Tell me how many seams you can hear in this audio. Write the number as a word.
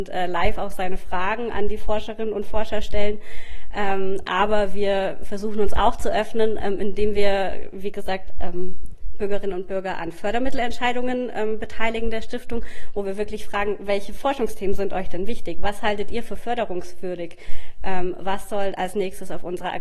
zero